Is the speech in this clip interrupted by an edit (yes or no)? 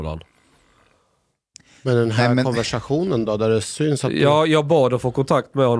no